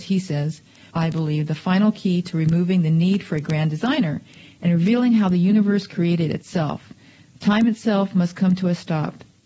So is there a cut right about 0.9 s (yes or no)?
yes